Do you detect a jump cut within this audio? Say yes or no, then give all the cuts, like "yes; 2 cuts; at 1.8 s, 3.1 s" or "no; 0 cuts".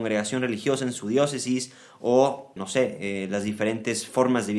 yes; 1 cut; at 2.6 s